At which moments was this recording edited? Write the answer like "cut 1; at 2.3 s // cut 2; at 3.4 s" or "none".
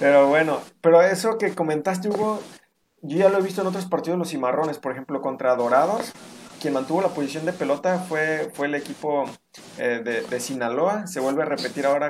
none